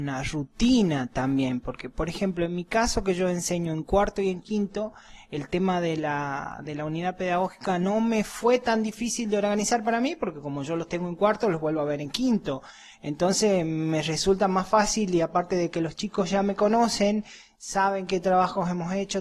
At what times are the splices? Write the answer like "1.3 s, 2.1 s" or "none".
none